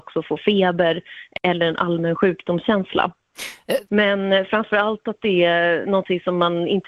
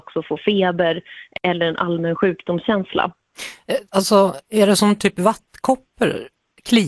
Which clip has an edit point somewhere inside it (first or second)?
first